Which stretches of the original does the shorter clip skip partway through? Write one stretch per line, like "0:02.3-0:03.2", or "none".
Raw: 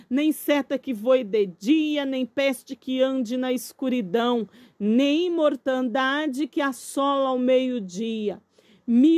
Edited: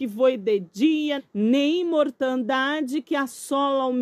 0:02.0-0:04.6